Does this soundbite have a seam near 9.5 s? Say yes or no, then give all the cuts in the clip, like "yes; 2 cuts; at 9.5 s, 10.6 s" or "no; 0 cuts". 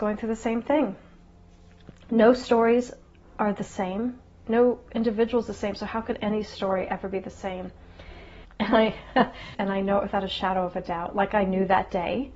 yes; 2 cuts; at 8.4 s, 9.5 s